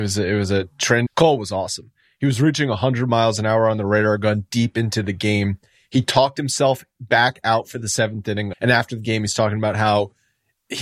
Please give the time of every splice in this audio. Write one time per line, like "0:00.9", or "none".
0:01.1
0:08.5